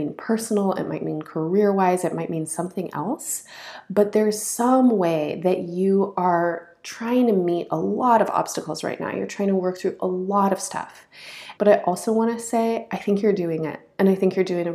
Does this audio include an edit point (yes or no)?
yes